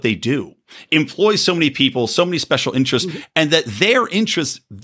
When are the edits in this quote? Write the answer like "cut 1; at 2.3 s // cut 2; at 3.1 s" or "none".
none